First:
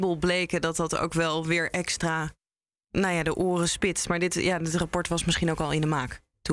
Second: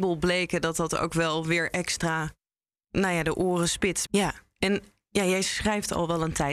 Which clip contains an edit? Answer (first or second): second